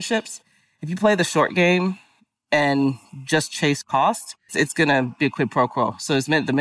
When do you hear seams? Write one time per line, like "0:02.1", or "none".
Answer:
0:04.5